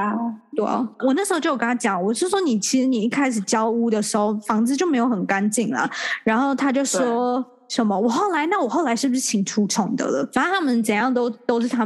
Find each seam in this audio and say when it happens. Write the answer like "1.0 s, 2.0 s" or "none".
none

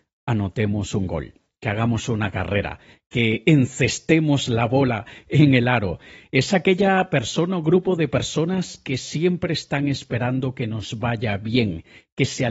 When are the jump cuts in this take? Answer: none

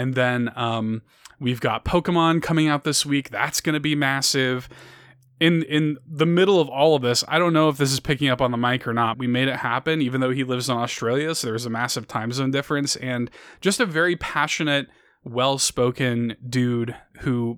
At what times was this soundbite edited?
9.1 s

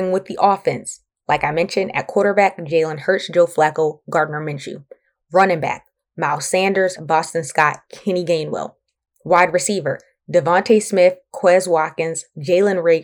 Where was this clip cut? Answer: none

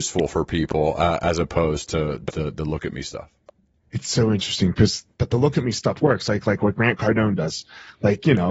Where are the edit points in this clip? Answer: none

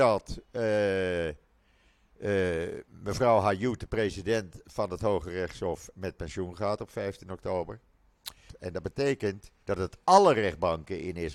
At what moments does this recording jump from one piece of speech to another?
8.5 s, 9.6 s

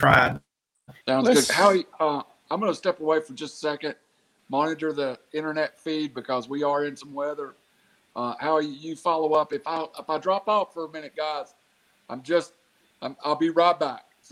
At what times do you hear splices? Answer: 1.0 s

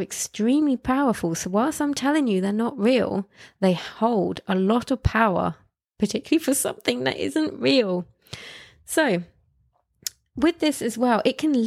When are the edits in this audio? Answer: none

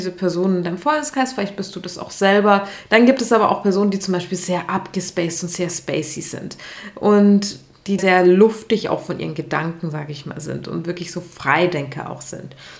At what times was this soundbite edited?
2.9 s, 8.0 s

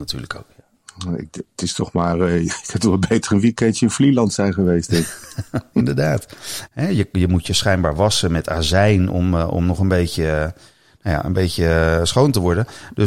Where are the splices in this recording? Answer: 6.7 s

